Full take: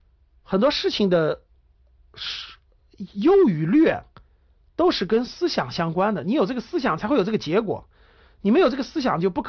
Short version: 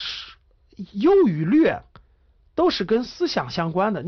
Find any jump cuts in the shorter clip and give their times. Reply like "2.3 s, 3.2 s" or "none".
none

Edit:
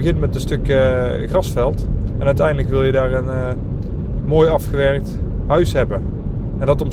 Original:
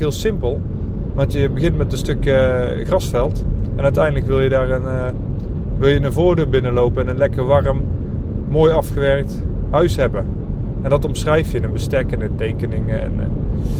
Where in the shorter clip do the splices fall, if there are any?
4.2 s

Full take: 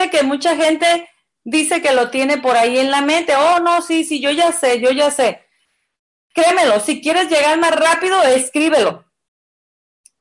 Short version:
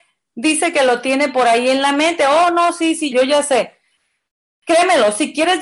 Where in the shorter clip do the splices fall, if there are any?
3.1 s

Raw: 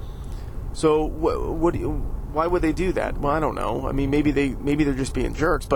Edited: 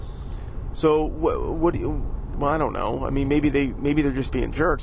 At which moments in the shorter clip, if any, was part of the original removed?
2.3 s

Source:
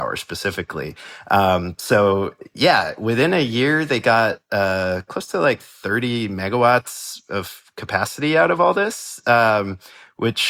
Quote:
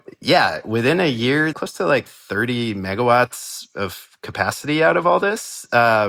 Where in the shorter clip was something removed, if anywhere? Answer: 1.5 s

